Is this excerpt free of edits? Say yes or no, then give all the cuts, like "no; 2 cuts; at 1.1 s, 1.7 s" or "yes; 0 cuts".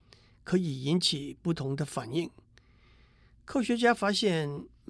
yes; 0 cuts